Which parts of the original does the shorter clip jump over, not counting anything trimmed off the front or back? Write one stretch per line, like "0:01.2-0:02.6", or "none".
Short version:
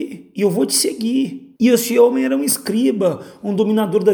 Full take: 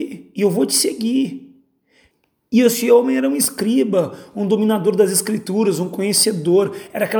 0:01.5-0:02.5